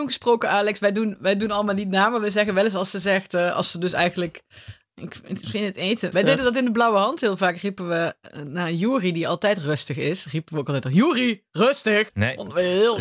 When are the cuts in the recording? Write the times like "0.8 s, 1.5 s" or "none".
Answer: 6.1 s, 12.1 s